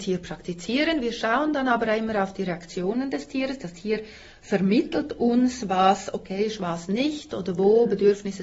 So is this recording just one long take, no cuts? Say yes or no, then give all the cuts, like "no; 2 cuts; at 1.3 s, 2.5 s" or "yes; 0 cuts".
yes; 0 cuts